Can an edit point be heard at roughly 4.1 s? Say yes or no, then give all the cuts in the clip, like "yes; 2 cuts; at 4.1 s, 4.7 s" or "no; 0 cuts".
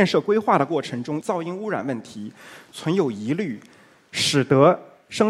no; 1 cut; at 1.2 s